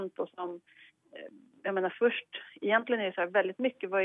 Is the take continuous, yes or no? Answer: yes